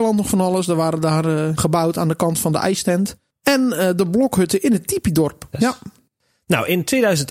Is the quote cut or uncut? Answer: cut